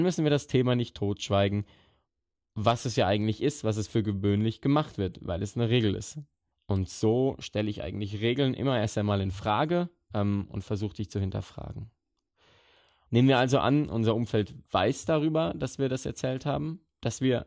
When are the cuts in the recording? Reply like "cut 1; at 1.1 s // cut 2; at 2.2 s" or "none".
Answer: cut 1; at 6.5 s // cut 2; at 13.1 s